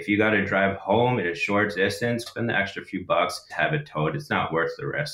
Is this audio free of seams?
no; 2 cuts; at 2.3 s, 3.5 s

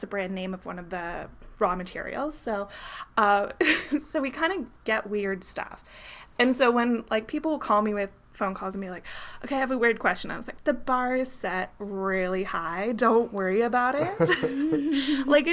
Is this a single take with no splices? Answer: yes; 0 cuts

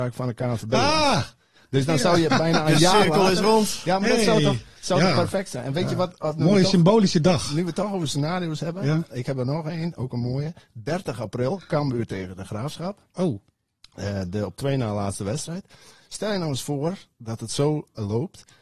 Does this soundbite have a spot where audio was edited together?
no; 0 cuts

